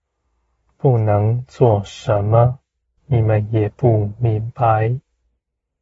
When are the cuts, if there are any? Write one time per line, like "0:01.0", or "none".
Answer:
0:03.0